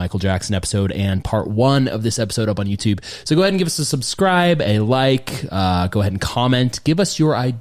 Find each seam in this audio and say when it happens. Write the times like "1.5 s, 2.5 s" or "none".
none